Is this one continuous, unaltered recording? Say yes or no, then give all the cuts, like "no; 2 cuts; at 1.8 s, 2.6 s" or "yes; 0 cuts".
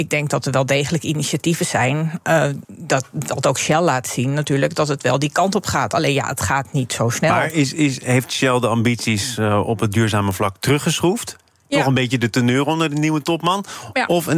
no; 1 cut; at 2.6 s